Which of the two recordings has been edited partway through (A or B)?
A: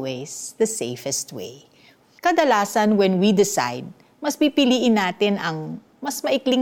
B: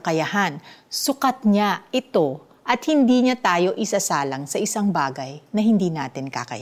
A